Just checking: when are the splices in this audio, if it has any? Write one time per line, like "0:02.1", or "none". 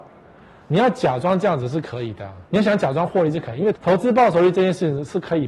0:02.5
0:03.7